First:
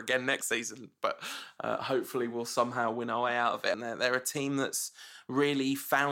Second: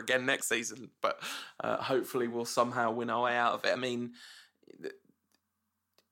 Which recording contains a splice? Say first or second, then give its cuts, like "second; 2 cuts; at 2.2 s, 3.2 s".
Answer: first; 1 cut; at 3.7 s